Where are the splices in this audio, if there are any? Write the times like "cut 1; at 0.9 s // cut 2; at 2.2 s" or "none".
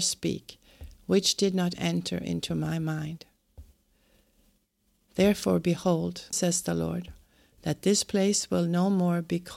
cut 1; at 1.8 s // cut 2; at 6.3 s